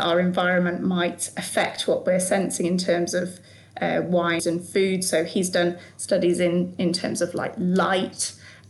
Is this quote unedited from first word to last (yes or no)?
no